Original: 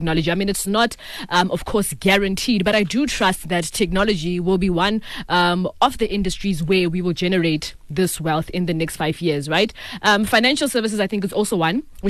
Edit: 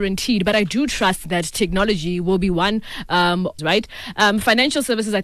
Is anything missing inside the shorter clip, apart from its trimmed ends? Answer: yes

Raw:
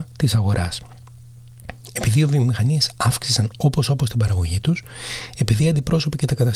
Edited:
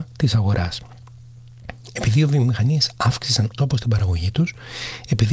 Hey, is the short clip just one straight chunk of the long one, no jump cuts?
no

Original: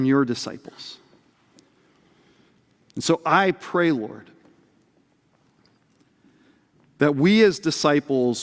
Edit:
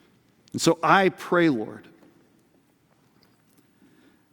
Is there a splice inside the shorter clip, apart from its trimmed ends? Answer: no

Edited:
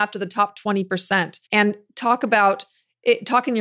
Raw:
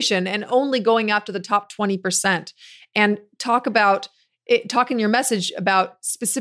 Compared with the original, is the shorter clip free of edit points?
no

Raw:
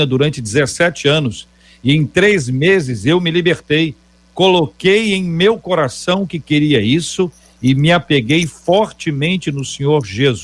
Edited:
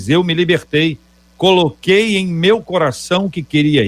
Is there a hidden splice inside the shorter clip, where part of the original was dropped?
no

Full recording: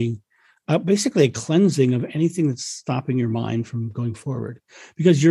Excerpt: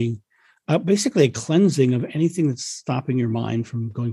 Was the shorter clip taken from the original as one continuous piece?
yes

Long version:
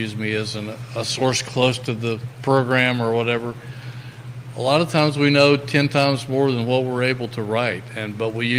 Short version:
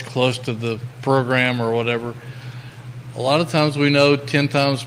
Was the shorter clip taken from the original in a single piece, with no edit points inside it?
yes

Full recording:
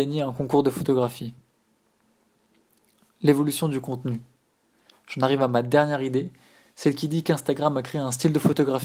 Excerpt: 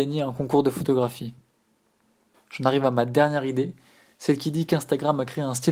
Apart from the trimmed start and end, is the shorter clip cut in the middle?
yes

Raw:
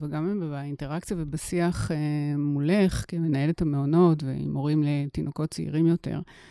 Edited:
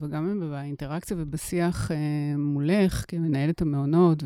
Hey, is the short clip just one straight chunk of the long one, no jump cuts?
yes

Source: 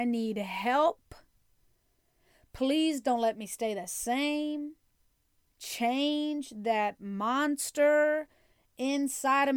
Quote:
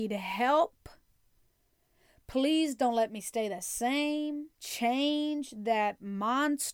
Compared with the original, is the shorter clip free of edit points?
no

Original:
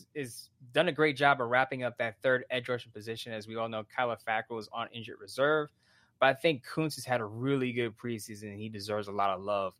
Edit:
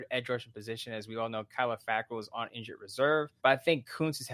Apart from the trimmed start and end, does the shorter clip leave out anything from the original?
yes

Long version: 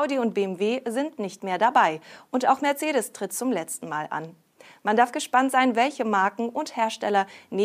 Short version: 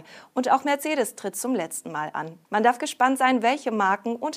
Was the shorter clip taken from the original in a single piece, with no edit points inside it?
no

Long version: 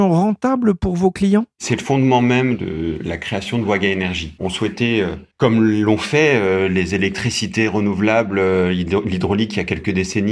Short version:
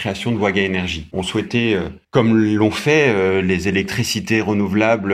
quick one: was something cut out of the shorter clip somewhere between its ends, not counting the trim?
no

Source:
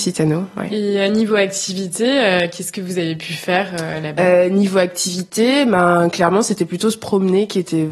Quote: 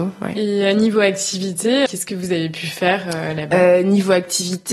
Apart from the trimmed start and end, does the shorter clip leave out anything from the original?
yes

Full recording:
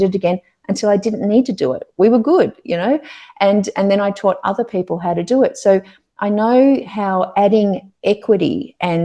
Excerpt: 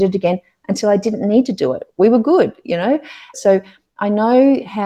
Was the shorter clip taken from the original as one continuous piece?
no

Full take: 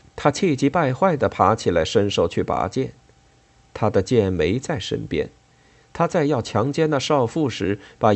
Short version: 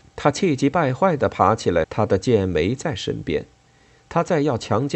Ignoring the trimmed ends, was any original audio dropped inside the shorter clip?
yes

